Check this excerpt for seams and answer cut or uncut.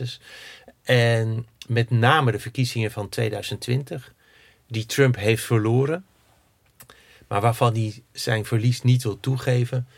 uncut